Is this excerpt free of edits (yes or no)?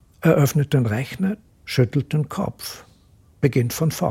no